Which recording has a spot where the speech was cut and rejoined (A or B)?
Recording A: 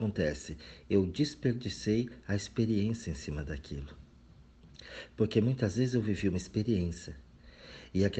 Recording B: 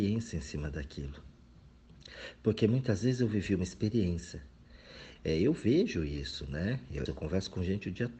B